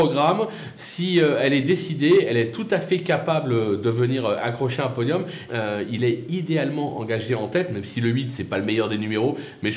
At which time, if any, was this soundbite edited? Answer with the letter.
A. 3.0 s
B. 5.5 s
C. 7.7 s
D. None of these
B